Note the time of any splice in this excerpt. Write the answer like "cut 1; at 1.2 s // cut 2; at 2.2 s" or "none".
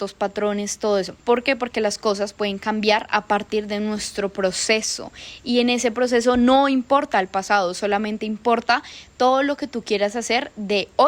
cut 1; at 1.2 s